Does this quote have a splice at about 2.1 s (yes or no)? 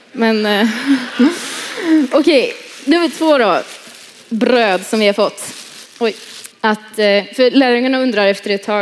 no